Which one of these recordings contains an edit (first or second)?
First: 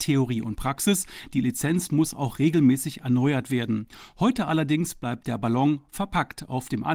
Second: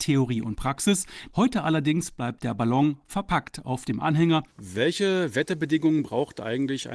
second